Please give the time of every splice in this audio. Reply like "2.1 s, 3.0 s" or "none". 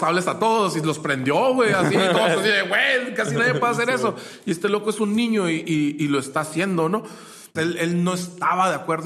7.6 s